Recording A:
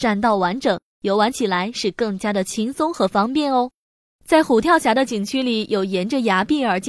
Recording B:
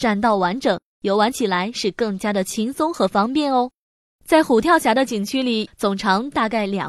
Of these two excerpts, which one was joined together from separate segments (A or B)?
B